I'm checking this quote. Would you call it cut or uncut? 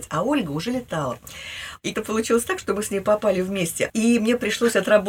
cut